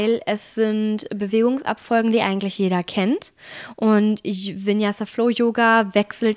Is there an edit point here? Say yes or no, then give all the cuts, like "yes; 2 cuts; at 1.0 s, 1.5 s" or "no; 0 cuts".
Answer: no; 0 cuts